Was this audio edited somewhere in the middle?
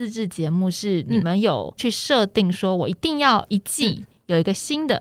no; 0 cuts

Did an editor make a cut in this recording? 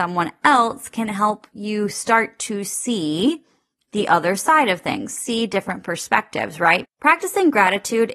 yes; 1 cut; at 6.8 s

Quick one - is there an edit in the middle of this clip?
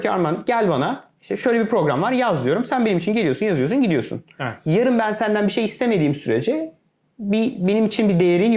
no; 0 cuts

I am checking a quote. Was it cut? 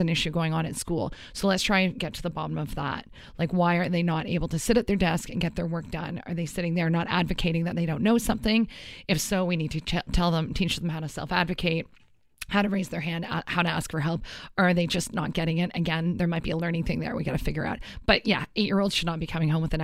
no; 0 cuts

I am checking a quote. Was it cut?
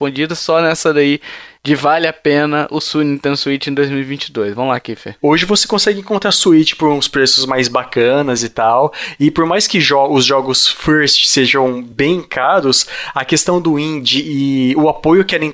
yes; 1 cut; at 5.2 s

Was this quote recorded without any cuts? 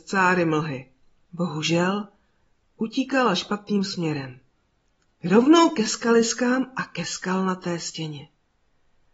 no; 1 cut; at 1.2 s

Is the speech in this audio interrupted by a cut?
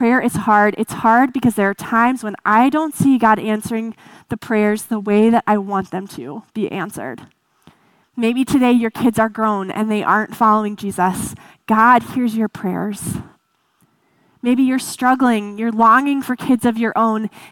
yes; 1 cut; at 8.0 s

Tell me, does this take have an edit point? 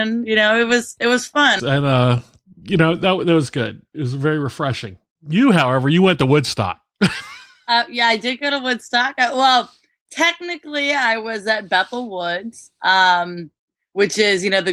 yes; 1 cut; at 1.6 s

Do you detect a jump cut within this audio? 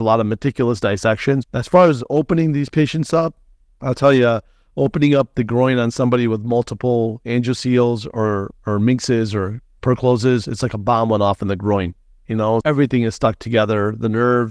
yes; 2 cuts; at 1.4 s, 12.6 s

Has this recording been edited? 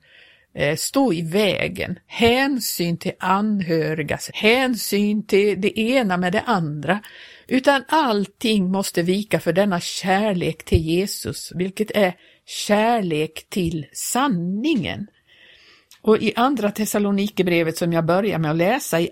yes; 1 cut; at 4.3 s

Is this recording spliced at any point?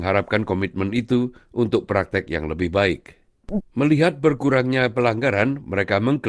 yes; 1 cut; at 3.6 s

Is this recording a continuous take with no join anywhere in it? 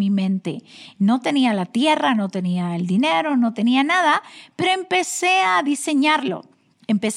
yes; 0 cuts

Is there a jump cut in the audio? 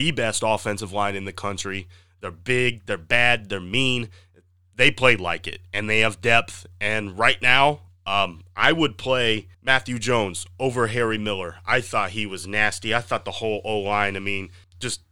no; 0 cuts

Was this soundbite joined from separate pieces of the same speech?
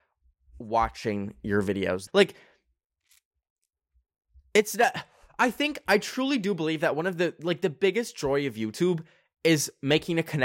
yes; 1 cut; at 2.1 s

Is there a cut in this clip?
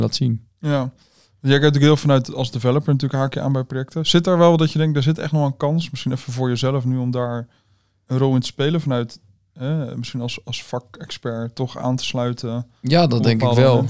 no; 0 cuts

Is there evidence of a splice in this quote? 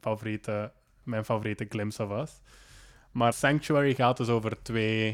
yes; 1 cut; at 3.3 s

